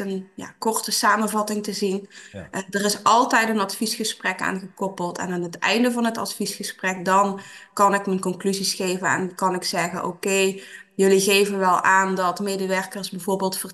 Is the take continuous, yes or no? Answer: yes